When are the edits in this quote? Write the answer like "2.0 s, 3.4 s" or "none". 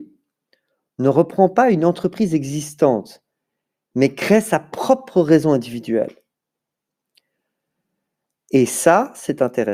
none